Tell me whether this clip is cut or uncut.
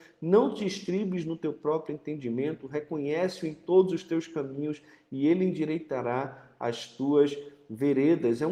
uncut